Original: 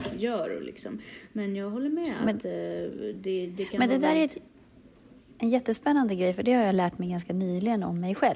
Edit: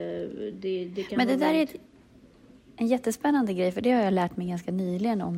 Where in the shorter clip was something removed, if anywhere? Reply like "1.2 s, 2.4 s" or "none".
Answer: none